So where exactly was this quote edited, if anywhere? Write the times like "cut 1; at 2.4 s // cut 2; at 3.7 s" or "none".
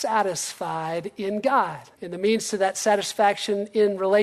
cut 1; at 1.9 s